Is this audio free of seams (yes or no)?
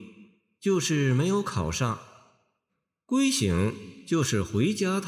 yes